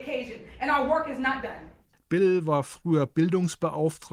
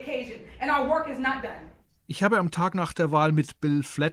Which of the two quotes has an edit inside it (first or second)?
first